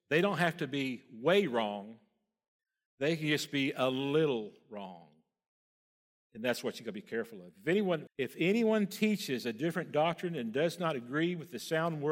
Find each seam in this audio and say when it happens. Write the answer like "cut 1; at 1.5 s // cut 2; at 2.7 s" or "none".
cut 1; at 8.1 s